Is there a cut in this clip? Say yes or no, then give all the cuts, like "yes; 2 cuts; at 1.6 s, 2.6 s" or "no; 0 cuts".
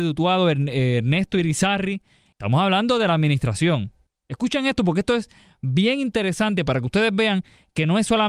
yes; 1 cut; at 2.3 s